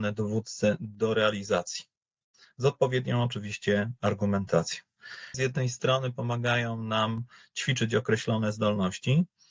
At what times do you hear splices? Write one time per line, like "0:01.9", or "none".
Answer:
0:05.3